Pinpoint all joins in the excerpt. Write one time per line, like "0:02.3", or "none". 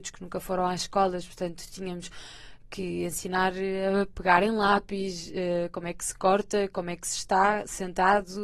none